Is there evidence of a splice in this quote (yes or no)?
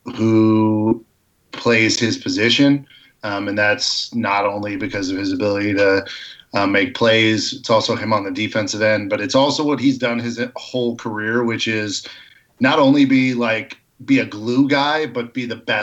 no